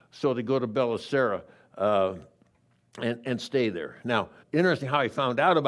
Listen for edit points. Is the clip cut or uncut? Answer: cut